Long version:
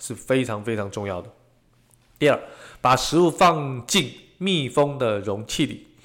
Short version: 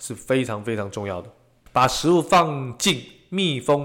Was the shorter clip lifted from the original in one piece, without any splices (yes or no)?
no